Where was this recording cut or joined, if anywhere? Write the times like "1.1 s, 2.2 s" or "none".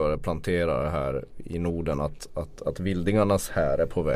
none